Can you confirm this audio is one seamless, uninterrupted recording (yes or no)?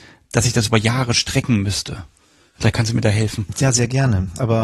yes